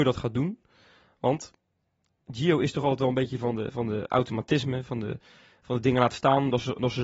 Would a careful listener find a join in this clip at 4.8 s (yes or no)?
no